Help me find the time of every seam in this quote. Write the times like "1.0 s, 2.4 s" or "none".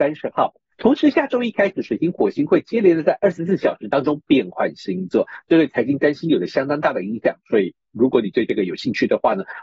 none